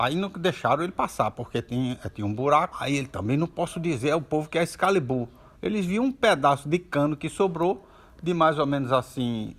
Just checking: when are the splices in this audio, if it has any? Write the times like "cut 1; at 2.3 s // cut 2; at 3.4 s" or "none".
cut 1; at 2.7 s // cut 2; at 5.5 s